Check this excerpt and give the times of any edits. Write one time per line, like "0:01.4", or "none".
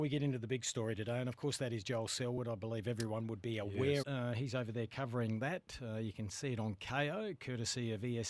0:04.0